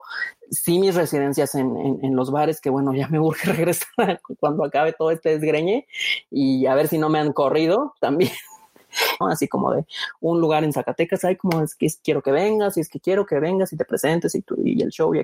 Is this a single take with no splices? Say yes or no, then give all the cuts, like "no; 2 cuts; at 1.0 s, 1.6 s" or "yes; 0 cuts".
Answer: no; 1 cut; at 9.2 s